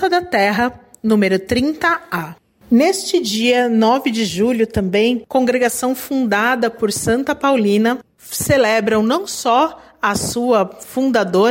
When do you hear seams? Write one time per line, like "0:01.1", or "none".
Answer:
0:05.3